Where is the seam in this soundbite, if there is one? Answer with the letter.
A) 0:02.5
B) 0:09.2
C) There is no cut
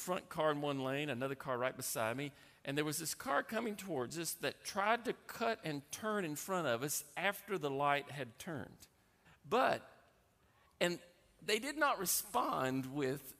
B